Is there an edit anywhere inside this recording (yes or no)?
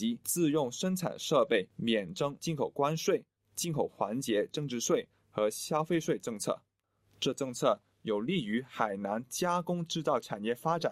no